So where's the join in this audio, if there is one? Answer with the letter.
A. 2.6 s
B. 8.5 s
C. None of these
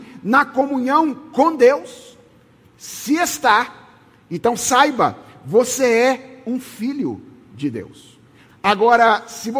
B